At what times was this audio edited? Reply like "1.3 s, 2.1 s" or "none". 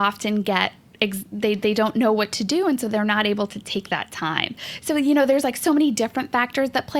none